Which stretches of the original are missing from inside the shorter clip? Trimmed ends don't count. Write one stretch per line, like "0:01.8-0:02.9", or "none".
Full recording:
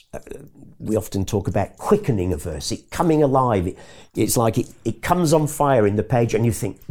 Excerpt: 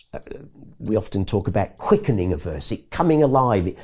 none